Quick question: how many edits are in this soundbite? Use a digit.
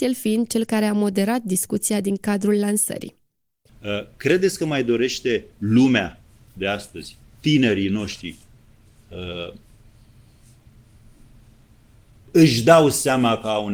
1